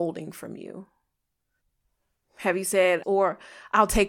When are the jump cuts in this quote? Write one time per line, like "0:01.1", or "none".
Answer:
0:03.0